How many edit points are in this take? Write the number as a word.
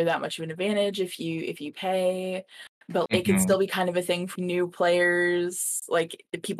two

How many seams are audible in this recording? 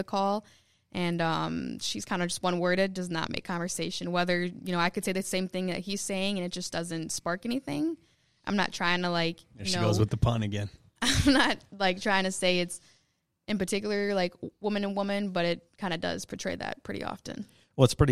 zero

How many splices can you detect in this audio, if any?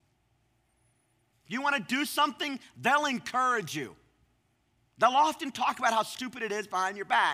one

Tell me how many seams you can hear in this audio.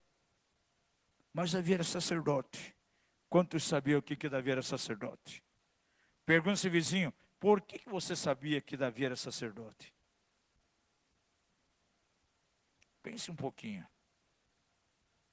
zero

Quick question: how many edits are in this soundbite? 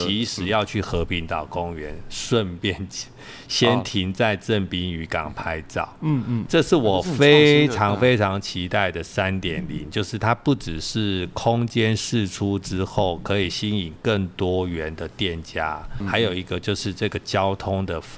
two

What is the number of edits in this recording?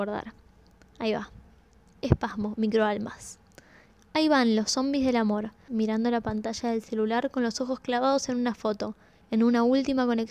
two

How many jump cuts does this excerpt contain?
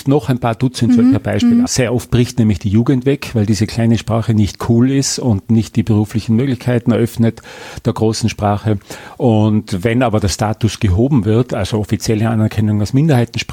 one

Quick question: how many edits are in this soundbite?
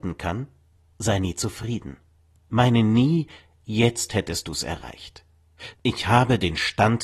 one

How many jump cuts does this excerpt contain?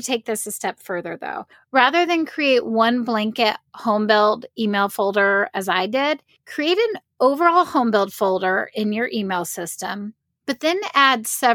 zero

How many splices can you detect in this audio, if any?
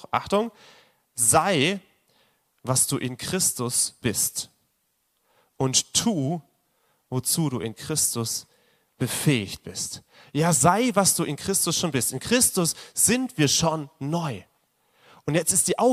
one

